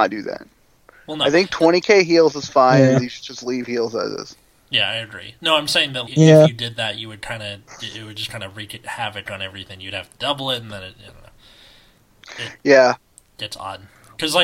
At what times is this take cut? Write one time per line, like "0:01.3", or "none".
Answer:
0:06.1